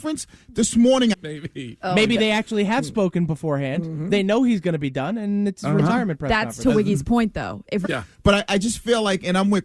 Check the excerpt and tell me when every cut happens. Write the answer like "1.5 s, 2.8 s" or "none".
1.1 s, 7.8 s